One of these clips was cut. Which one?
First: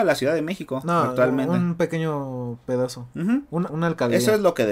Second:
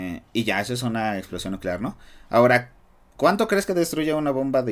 first; 1 cut; at 3.7 s

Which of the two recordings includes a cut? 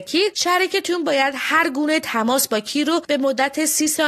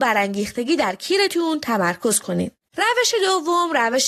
second; 1 cut; at 2.7 s

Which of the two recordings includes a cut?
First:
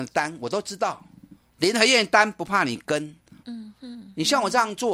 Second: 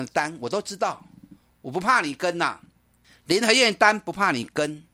first; 2 cuts; at 1.5 s, 3.4 s

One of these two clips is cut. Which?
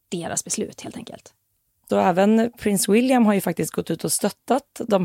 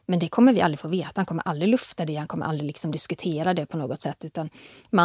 first; 1 cut; at 1.9 s

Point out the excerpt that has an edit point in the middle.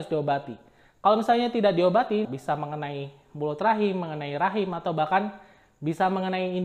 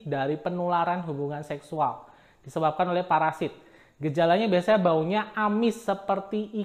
first; 1 cut; at 2.2 s

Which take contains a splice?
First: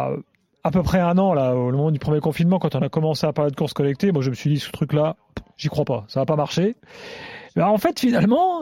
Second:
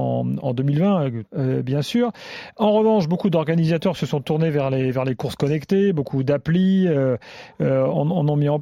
second; 1 cut; at 1.3 s

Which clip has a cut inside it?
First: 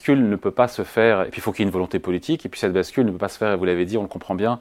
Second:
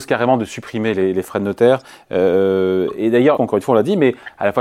second; 1 cut; at 3.4 s

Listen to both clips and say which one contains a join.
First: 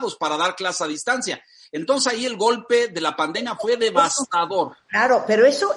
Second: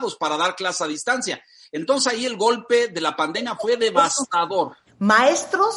second; 1 cut; at 4.9 s

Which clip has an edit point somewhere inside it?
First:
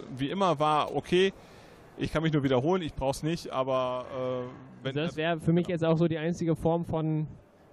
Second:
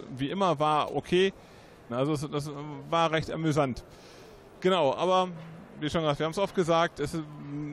second; 1 cut; at 1.9 s

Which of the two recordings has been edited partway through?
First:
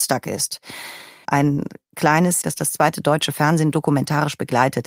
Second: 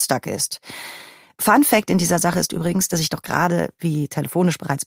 first; 2 cuts; at 1.2 s, 2.4 s

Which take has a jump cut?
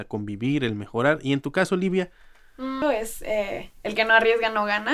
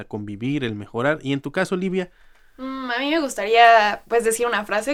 first; 1 cut; at 2.8 s

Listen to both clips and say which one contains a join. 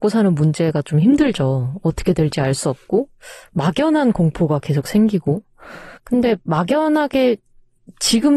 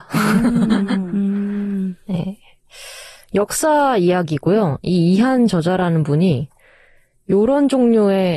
first; 1 cut; at 6.0 s

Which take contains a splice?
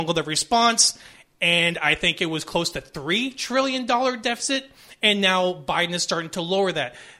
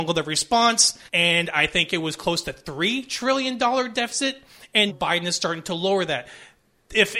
second; 2 cuts; at 1.1 s, 4.9 s

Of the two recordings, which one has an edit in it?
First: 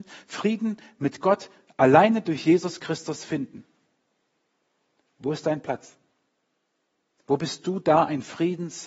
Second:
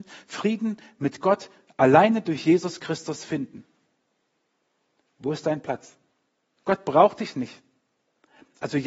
second; 1 cut; at 6.6 s

